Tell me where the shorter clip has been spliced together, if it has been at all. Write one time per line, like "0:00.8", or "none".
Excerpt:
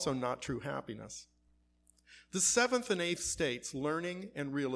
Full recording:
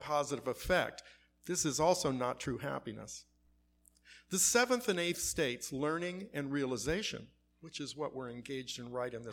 none